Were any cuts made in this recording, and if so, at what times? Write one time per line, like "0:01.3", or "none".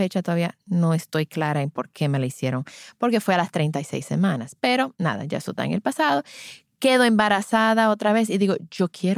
none